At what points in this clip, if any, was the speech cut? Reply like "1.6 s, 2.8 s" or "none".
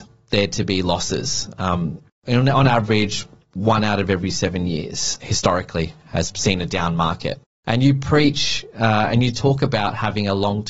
5.2 s